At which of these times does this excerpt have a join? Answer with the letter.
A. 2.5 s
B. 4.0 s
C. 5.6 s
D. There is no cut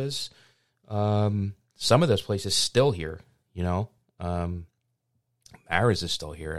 D